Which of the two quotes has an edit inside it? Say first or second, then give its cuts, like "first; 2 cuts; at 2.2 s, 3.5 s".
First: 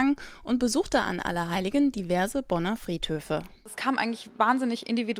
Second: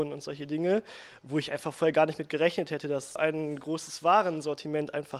second; 1 cut; at 3.2 s